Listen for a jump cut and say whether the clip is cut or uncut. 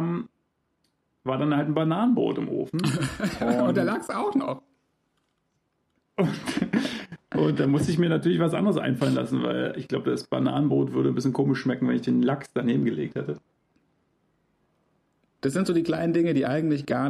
cut